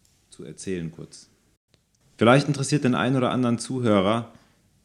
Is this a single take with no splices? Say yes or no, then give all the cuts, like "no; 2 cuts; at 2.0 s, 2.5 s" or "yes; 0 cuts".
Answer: no; 1 cut; at 2.0 s